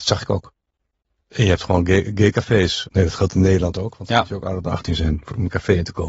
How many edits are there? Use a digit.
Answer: 1